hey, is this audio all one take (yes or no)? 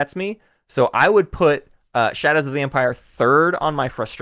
yes